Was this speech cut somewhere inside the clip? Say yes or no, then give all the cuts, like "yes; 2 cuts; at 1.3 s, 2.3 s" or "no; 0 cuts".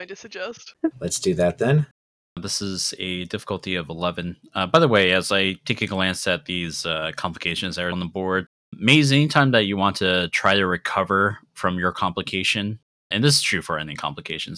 yes; 3 cuts; at 0.9 s, 7.9 s, 13.1 s